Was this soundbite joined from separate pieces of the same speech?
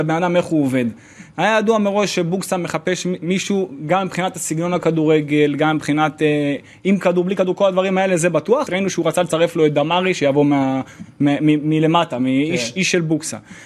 yes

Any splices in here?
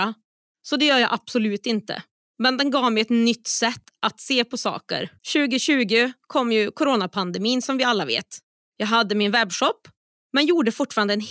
yes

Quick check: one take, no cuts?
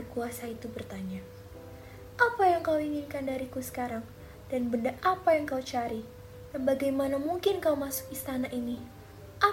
no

